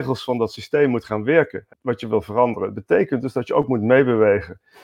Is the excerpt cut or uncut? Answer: cut